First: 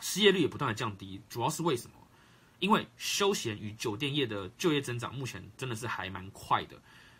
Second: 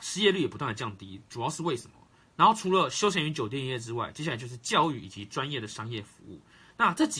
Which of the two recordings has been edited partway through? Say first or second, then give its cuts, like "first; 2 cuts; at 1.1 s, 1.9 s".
second; 1 cut; at 2.2 s